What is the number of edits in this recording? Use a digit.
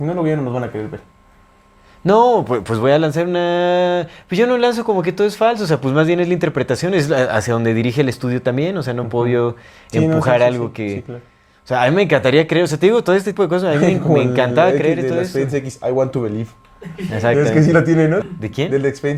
2